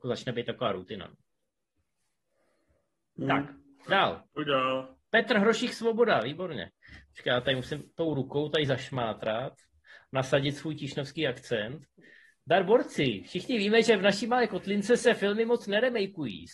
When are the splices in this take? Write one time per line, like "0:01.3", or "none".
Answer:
none